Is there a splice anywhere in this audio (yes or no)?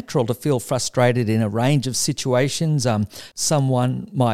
yes